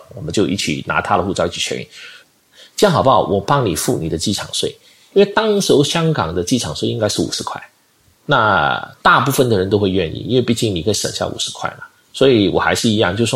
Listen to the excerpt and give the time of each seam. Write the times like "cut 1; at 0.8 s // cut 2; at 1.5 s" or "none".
cut 1; at 2.2 s